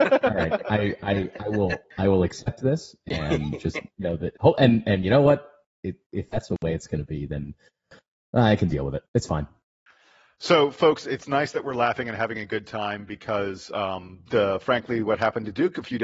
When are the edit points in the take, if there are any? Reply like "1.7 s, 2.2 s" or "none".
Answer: 6.5 s